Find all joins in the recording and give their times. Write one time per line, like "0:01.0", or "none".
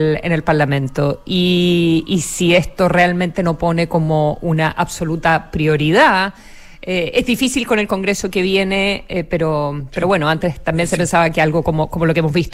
none